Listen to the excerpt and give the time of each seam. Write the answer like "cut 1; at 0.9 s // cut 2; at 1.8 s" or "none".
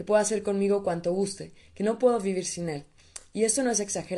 none